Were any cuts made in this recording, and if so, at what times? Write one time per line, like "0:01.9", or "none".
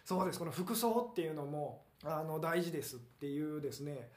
0:01.9